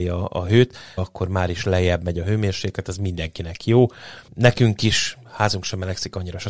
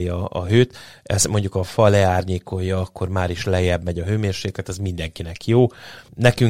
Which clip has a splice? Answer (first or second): first